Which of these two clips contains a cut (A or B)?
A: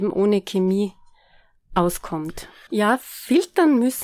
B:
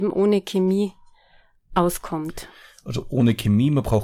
A